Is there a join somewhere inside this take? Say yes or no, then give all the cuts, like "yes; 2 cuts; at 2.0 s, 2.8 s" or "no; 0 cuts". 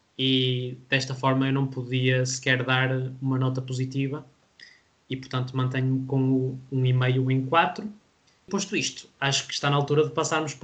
no; 0 cuts